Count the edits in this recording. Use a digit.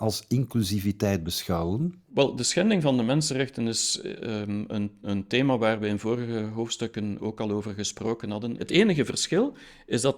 1